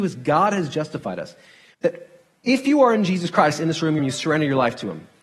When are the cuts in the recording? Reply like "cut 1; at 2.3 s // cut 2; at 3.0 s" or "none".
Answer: cut 1; at 1.7 s // cut 2; at 4.0 s